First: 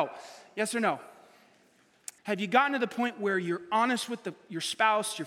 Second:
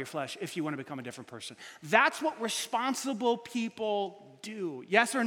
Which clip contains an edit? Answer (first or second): first